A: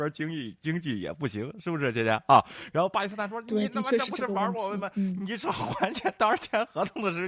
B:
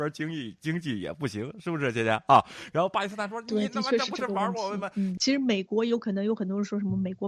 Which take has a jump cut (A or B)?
B